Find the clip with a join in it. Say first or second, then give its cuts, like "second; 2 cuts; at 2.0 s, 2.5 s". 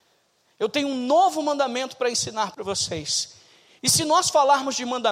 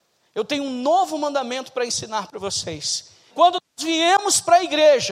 second; 1 cut; at 3.3 s